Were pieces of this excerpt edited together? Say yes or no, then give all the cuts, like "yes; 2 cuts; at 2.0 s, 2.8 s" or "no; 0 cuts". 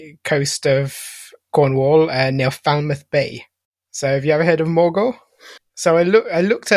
yes; 1 cut; at 5.6 s